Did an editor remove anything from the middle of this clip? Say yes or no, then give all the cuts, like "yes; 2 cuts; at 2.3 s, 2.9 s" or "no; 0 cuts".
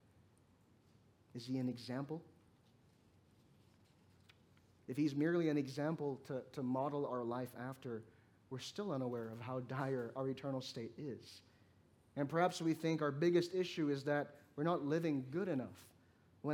no; 0 cuts